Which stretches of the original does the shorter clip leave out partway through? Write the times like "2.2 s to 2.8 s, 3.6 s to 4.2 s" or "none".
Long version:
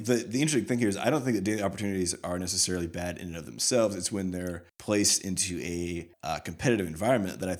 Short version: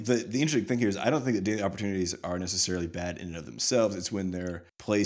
none